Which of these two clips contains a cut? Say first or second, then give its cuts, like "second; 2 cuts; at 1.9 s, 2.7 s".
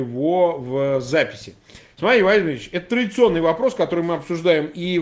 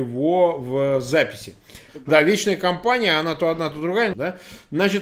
second; 2 cuts; at 1.9 s, 4.1 s